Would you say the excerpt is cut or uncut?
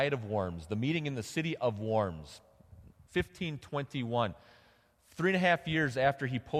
uncut